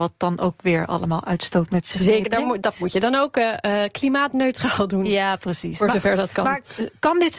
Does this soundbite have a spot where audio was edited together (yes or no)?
no